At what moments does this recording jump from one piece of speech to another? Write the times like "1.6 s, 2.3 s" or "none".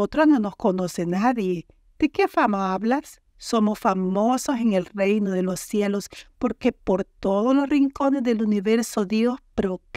3.3 s